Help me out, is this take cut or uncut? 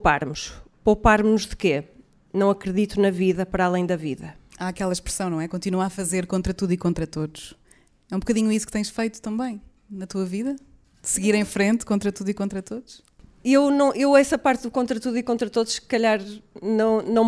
uncut